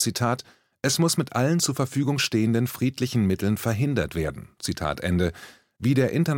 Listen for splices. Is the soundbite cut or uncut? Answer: uncut